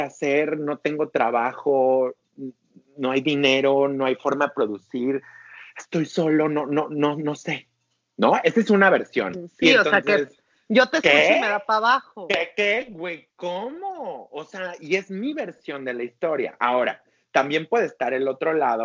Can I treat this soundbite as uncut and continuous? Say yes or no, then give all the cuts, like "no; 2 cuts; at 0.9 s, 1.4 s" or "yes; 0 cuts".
yes; 0 cuts